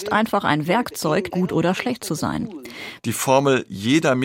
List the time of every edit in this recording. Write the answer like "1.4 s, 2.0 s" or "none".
1.3 s, 3.0 s